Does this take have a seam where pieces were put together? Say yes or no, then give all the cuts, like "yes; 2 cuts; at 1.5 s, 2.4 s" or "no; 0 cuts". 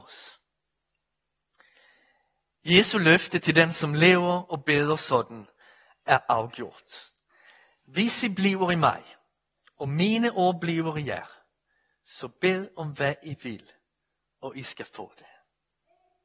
no; 0 cuts